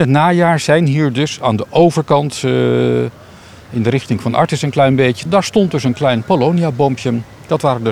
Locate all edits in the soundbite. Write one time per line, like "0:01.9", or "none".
0:05.3

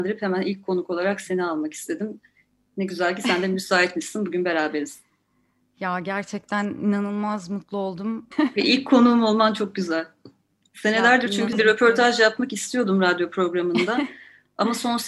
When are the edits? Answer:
0:08.3
0:11.5

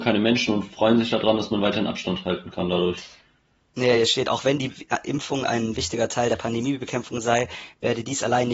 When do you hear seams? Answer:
none

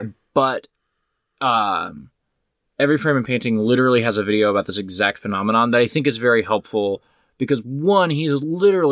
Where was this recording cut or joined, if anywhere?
none

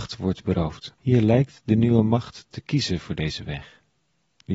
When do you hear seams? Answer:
0:00.9

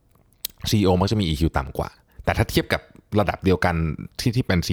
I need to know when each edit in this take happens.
none

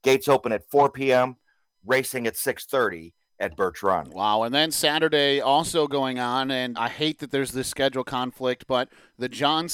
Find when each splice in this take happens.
0:06.7

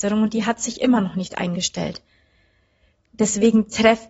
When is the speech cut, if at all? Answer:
0:03.1

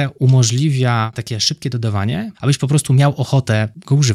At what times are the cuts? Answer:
0:02.3

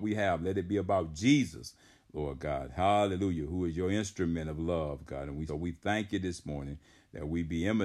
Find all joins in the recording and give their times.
0:05.5

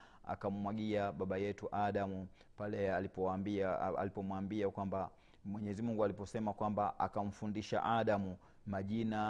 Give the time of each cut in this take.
none

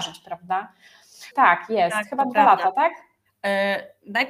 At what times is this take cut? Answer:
0:01.3

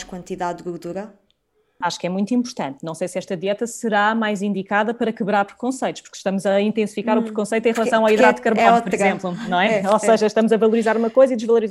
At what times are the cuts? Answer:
0:01.8

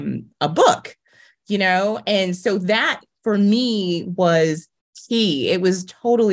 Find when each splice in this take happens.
none

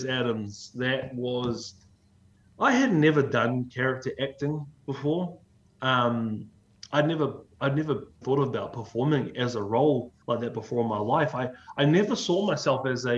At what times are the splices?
0:08.2
0:10.2

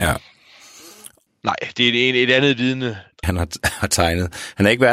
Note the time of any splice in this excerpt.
0:01.3
0:03.2

